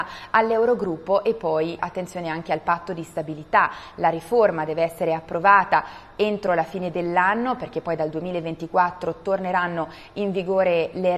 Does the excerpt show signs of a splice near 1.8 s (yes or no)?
yes